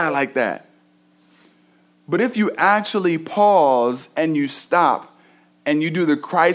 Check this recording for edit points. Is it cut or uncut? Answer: uncut